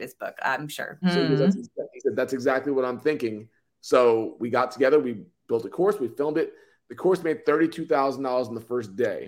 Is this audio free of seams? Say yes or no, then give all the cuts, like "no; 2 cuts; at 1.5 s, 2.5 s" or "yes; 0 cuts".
no; 1 cut; at 1.0 s